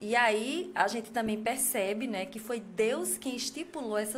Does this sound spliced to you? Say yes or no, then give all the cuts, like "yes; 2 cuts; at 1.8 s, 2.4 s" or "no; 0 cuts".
no; 0 cuts